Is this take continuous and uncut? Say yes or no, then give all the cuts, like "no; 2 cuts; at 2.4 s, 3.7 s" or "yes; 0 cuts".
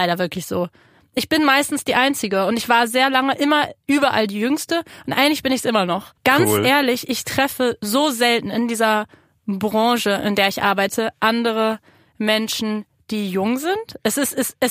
no; 1 cut; at 6.2 s